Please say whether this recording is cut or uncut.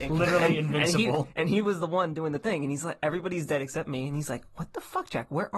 uncut